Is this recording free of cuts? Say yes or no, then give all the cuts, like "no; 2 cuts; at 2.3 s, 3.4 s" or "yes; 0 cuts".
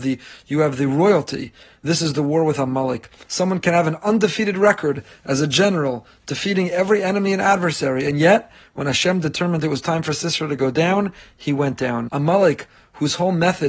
no; 2 cuts; at 3.2 s, 12.1 s